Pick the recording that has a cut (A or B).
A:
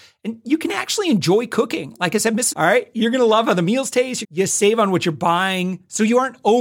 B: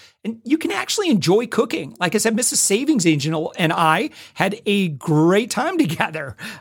A